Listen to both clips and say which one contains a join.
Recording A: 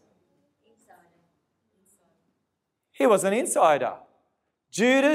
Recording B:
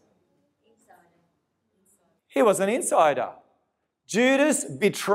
B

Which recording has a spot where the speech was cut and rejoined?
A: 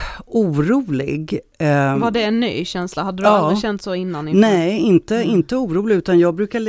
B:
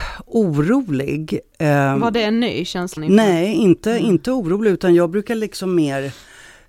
B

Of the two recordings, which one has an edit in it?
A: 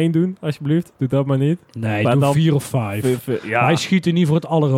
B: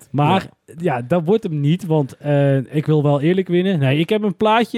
A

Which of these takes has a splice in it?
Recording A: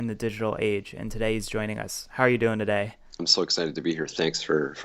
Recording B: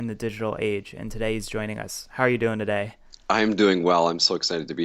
A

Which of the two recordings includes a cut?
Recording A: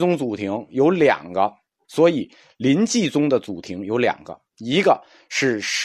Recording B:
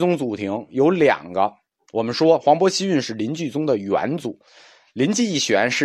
A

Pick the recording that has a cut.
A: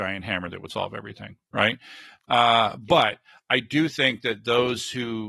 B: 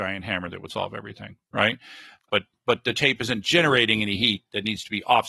B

